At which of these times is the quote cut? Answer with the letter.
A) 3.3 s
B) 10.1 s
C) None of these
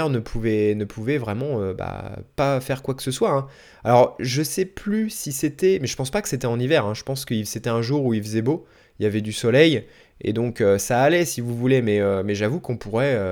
C